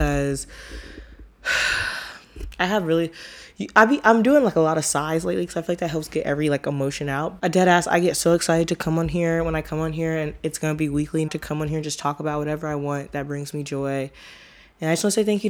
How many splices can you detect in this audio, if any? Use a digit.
2